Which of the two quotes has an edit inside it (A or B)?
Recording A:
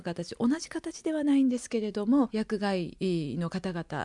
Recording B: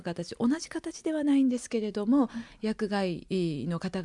A